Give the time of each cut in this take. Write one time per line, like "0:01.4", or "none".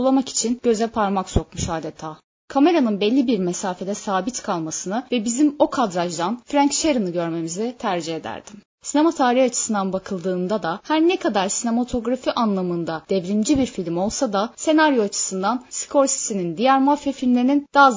0:08.7

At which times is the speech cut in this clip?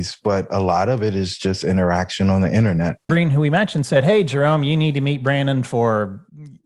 0:03.1

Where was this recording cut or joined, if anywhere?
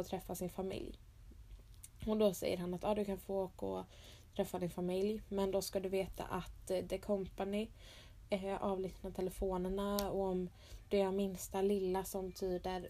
none

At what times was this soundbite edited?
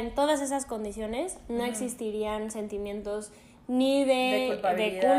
none

